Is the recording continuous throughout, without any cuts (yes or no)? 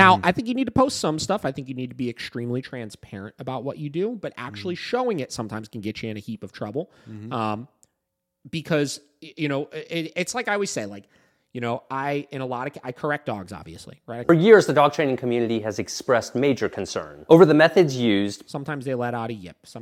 no